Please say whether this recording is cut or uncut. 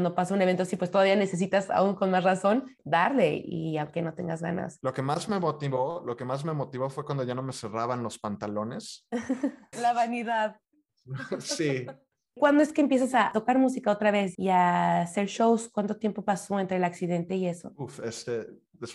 cut